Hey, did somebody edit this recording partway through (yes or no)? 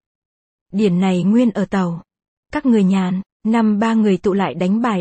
yes